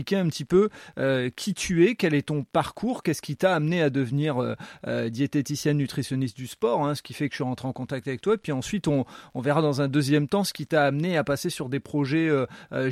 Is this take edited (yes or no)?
no